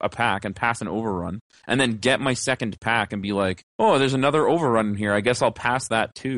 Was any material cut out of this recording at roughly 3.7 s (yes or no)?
yes